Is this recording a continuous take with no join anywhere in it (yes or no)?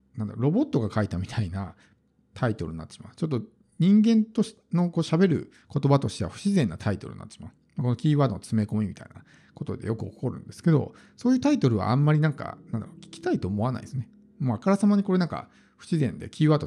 yes